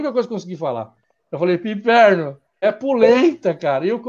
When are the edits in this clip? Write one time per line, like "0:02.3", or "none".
0:02.6